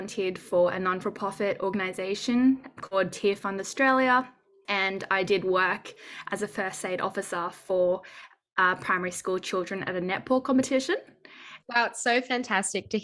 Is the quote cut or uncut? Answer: cut